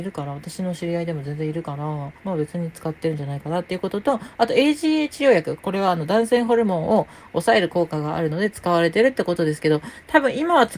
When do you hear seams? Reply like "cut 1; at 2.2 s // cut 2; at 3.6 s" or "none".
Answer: cut 1; at 2.2 s // cut 2; at 5.6 s